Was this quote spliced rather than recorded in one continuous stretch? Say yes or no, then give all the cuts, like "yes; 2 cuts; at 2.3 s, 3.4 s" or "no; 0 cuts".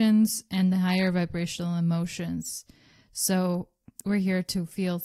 no; 0 cuts